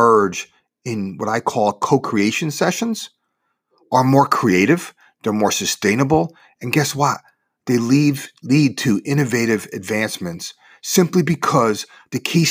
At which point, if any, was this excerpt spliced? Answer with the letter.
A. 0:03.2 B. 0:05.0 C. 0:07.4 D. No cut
D